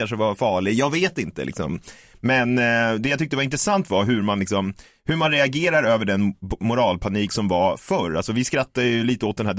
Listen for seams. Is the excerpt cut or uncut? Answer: uncut